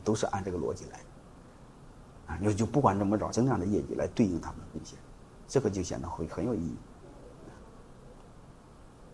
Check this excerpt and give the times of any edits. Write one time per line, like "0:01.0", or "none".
0:03.3